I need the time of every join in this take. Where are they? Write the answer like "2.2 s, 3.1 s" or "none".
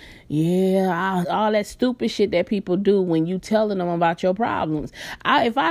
1.2 s